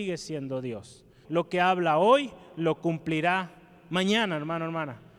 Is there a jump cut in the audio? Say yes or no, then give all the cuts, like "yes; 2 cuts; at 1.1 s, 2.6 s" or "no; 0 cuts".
yes; 1 cut; at 1.2 s